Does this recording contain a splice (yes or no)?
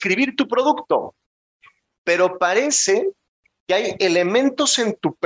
no